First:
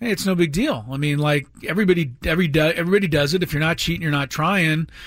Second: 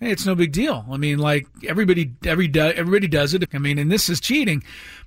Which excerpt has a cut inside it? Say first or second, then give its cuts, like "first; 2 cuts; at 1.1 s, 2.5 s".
second; 1 cut; at 3.5 s